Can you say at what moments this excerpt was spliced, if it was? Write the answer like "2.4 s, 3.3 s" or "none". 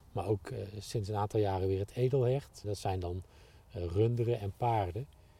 2.6 s